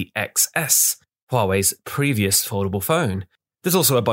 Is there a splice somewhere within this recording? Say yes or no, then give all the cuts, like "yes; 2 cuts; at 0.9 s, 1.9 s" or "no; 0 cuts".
no; 0 cuts